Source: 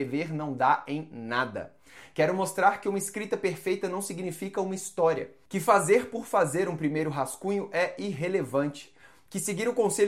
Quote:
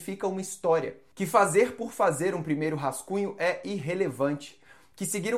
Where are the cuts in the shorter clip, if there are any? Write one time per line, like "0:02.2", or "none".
none